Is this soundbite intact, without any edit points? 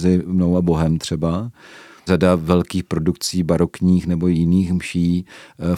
no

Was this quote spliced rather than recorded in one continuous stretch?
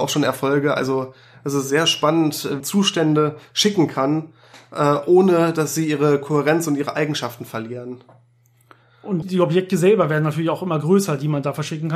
yes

